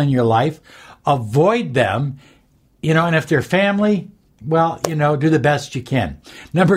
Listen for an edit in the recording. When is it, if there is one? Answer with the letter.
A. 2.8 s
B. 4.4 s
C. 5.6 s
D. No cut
D